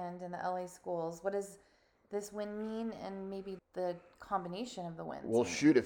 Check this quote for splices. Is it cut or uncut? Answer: cut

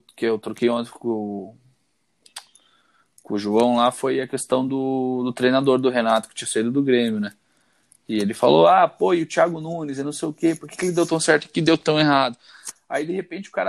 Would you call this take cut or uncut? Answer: uncut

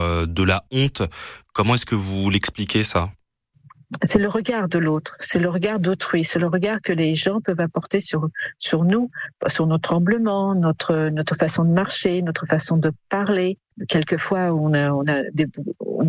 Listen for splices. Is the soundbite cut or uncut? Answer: uncut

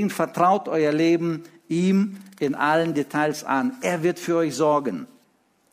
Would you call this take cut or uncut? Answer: uncut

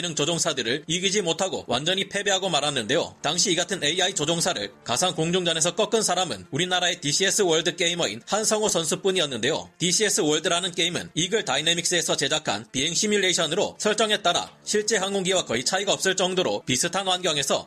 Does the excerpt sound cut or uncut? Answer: uncut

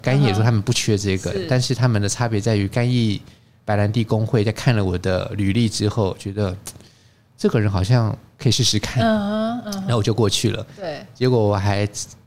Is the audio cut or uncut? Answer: uncut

